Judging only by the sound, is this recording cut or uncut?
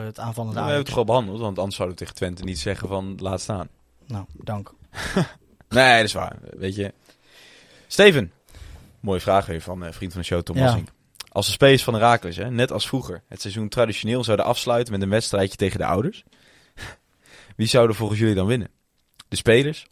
cut